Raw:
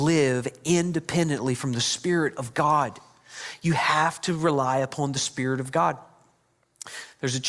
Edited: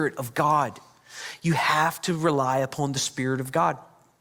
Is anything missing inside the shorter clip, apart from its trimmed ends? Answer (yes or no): no